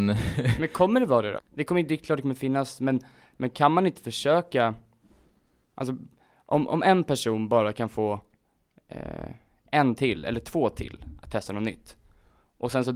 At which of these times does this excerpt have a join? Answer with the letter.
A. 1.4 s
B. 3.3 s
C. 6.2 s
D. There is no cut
A